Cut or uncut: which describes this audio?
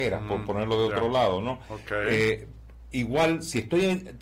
uncut